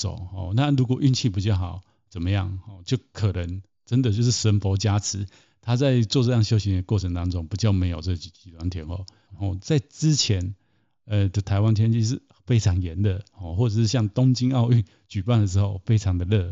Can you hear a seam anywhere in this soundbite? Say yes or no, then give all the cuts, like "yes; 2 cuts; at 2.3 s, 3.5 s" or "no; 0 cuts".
yes; 1 cut; at 9.3 s